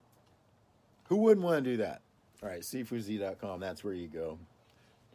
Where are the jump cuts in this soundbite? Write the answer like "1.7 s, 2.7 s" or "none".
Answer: none